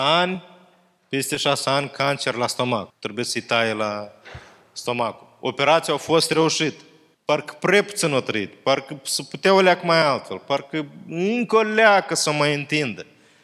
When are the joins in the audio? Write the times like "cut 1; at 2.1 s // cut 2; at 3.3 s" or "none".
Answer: cut 1; at 2.9 s // cut 2; at 7.1 s

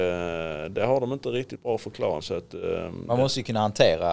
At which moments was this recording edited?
cut 1; at 2.2 s

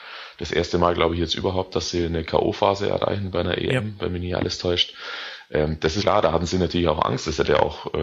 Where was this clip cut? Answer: cut 1; at 6.0 s

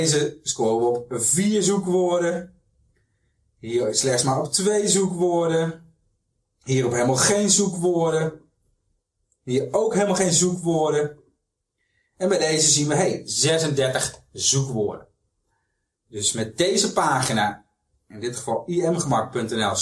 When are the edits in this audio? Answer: none

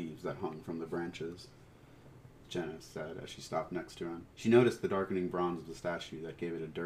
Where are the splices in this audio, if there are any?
cut 1; at 2.3 s // cut 2; at 4.3 s

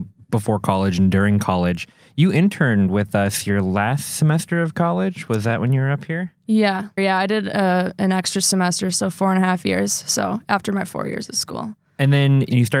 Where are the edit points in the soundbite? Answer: cut 1; at 7.0 s

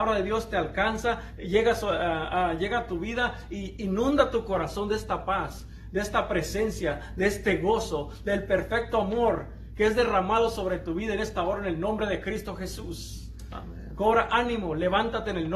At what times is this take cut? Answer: none

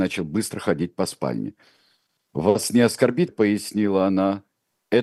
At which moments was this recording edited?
cut 1; at 3.3 s

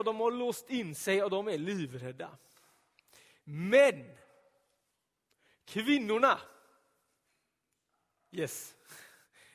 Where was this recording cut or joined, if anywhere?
none

